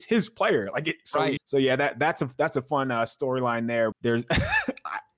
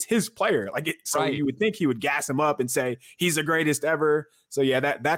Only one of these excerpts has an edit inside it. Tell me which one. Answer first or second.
first